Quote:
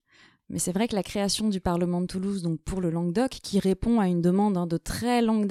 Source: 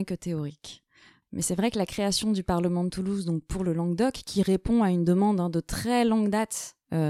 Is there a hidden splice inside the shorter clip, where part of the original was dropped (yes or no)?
no